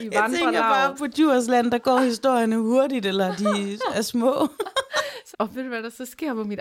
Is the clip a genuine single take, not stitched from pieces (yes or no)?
no